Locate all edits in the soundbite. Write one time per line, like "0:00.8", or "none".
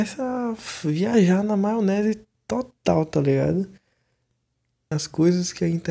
0:04.9